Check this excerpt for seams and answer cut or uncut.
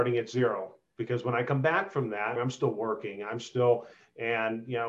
cut